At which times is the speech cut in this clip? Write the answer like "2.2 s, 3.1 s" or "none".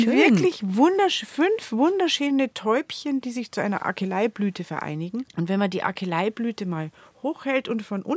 5.3 s